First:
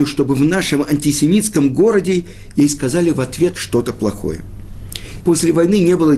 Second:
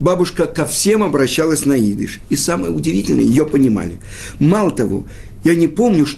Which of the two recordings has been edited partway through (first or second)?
first